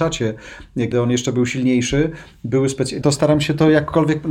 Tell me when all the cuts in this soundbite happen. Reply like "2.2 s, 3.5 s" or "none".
0.9 s, 3.0 s